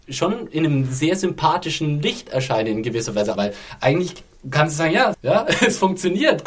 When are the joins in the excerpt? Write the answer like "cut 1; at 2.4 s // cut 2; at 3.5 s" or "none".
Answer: cut 1; at 3.4 s // cut 2; at 5.1 s